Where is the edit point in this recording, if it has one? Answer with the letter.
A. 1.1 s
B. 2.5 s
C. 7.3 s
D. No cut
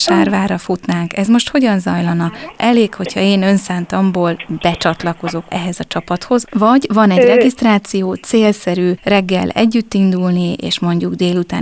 D